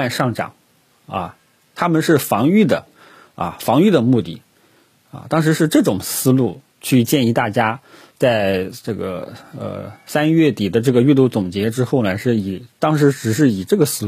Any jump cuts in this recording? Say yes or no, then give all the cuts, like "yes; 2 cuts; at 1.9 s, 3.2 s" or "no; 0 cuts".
no; 0 cuts